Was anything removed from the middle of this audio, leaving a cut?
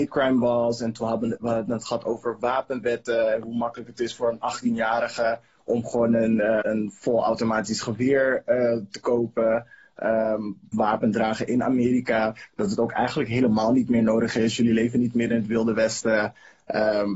yes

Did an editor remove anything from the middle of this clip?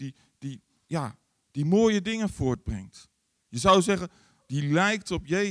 yes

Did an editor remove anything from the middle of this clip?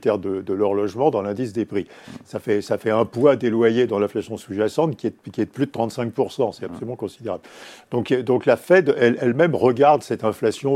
no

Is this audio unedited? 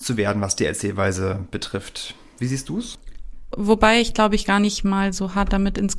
no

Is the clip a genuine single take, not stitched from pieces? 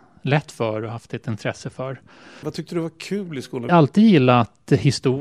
no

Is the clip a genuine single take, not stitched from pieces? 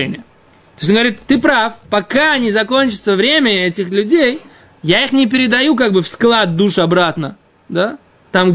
yes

